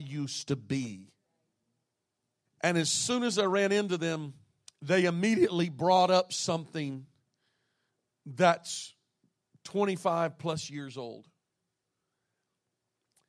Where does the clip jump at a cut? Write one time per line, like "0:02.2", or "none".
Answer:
0:02.5